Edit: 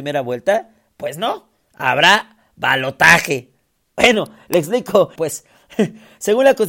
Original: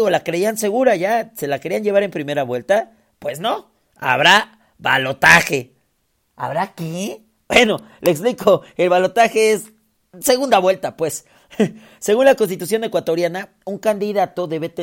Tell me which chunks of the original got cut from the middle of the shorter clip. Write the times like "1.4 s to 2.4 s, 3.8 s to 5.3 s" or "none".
6.1 s to 7.4 s, 8.7 s to 11.0 s